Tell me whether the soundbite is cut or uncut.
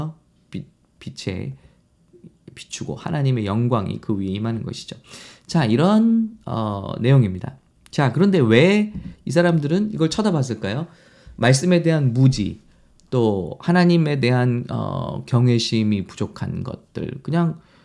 uncut